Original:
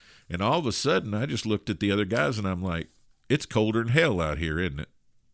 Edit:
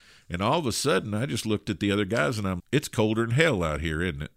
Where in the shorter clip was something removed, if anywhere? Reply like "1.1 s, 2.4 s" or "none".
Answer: 2.6 s

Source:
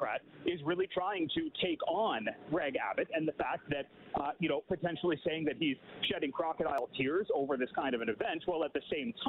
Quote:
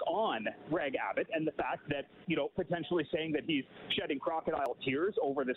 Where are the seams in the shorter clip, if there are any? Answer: 2.2 s

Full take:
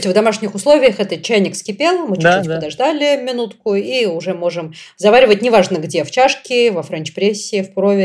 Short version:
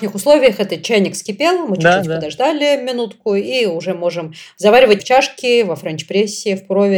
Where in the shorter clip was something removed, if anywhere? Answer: 5.0 s

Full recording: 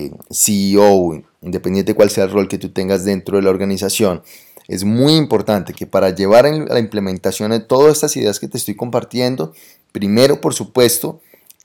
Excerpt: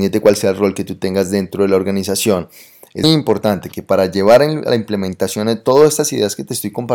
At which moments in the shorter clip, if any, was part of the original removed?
3.0 s

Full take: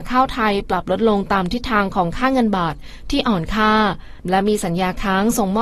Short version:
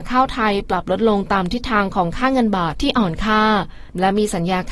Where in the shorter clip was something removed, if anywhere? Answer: 2.7 s

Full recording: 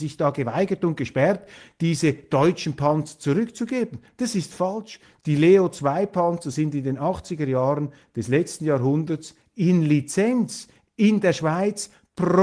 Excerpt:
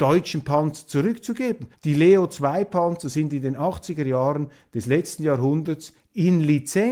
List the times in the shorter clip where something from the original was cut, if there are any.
1.7 s

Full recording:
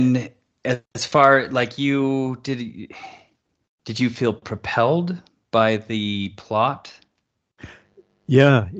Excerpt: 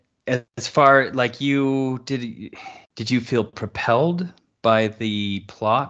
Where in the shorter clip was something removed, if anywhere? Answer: 2.9 s

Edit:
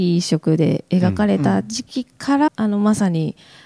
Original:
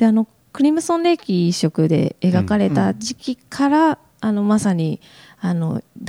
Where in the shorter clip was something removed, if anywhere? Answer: 2.5 s

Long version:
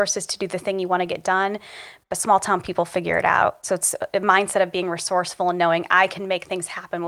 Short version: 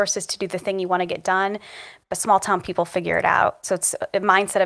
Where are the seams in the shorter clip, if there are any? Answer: none

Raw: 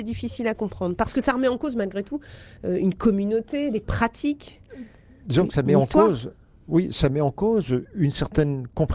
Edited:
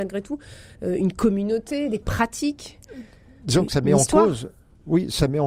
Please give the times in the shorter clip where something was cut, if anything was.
none

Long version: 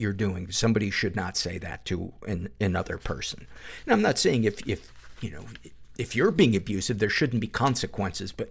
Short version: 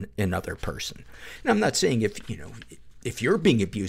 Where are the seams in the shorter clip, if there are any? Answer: 2.2 s

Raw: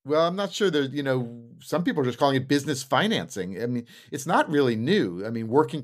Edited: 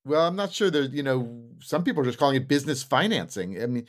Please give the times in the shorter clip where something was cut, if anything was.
none

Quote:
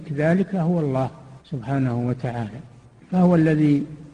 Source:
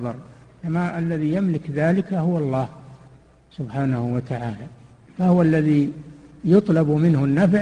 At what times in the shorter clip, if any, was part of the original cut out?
1.4 s

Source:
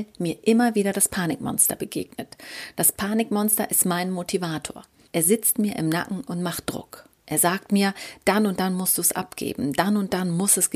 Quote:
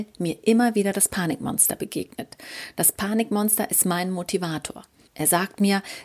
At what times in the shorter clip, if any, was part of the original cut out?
5.1 s

